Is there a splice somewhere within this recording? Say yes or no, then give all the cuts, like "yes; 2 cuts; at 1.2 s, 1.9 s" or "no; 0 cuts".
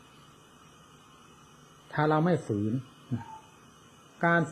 no; 0 cuts